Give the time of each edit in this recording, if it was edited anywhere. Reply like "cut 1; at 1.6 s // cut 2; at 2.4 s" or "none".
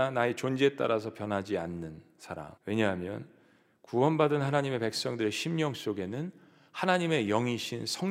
cut 1; at 2.6 s